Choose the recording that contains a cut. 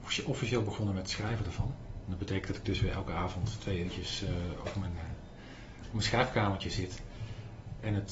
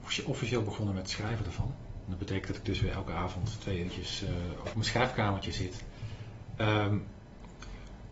second; 2 cuts; at 4.7 s, 6.6 s

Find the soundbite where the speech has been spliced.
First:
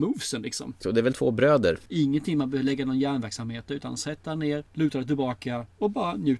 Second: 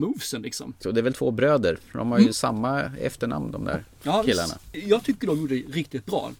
first; 2 cuts; at 1.9 s, 4.7 s

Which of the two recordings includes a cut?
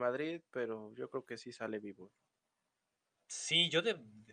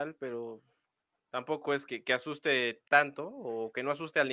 second; 1 cut; at 1.8 s

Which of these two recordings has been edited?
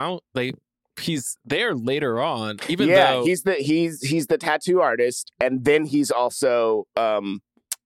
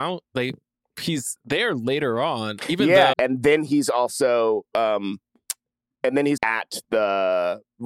second; 2 cuts; at 3.1 s, 6.4 s

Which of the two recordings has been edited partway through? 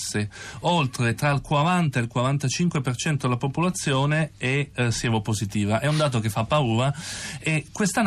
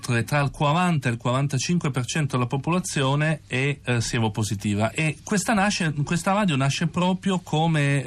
second; 1 cut; at 4.9 s

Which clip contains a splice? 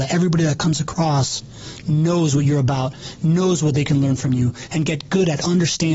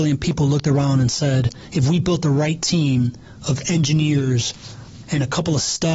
second; 1 cut; at 5.0 s

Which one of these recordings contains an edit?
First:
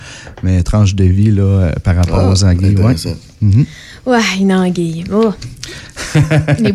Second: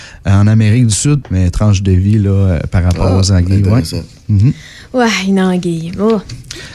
second; 1 cut; at 1.2 s

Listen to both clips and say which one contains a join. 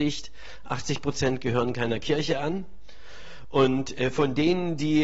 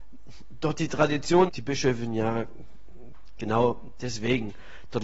second; 1 cut; at 1.5 s

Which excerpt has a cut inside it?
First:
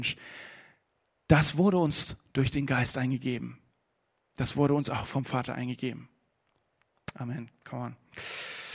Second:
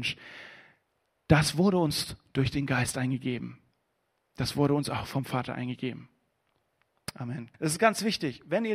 second; 1 cut; at 7.5 s

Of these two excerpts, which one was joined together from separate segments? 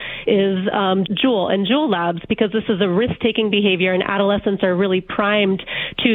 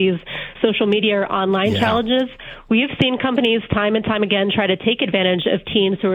first; 1 cut; at 1.1 s

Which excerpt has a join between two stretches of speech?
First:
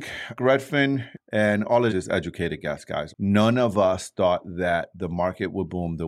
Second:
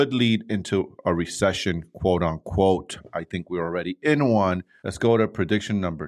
first; 2 cuts; at 1.9 s, 3.1 s

